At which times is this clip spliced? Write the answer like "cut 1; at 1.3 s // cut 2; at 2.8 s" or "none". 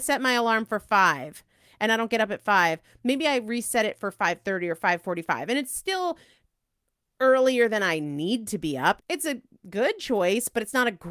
cut 1; at 9.0 s